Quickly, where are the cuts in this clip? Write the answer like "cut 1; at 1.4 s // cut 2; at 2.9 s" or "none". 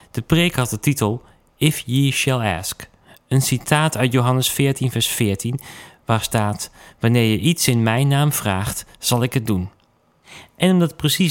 none